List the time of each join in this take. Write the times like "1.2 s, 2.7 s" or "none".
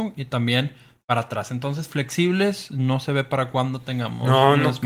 none